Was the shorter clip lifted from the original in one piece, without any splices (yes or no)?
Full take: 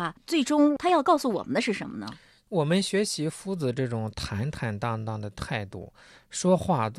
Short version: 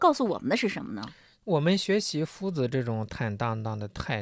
no